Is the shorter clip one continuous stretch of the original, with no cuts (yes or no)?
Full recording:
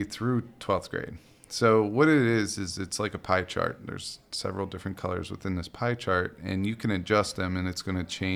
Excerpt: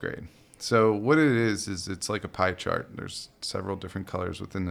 yes